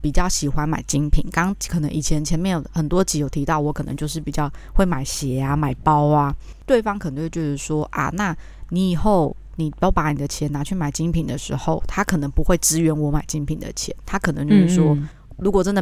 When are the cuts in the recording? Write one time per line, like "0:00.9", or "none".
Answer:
none

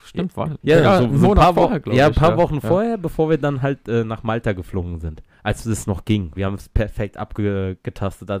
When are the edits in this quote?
0:05.3
0:06.4

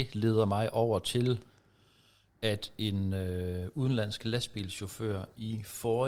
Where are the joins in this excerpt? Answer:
none

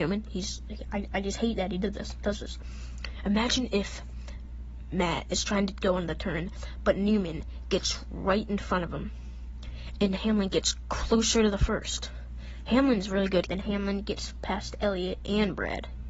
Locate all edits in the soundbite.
0:10.0
0:13.5

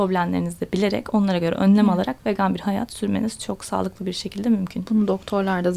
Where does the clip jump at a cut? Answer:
none

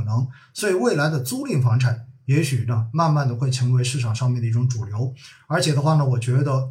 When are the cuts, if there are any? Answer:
none

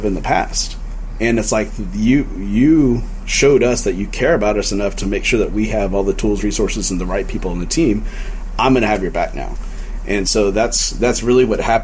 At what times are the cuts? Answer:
none

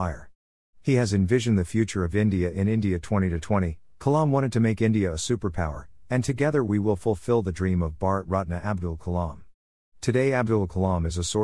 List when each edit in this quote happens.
none

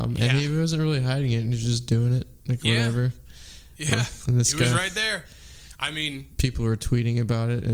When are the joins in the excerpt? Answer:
none

